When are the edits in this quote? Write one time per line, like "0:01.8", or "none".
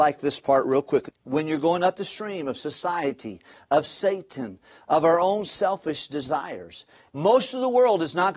0:01.1
0:07.1